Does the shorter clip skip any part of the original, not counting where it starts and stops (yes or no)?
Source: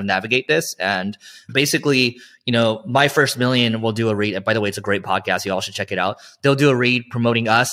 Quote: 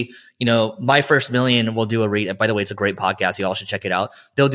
no